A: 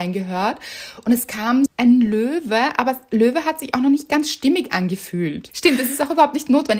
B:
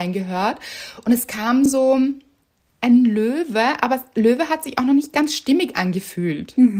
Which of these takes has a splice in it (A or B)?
A